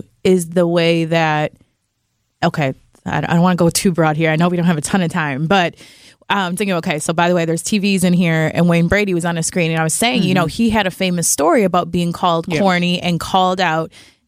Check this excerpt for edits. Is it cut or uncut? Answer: cut